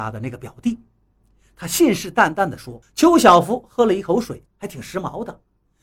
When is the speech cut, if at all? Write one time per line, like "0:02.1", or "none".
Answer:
0:02.8
0:04.5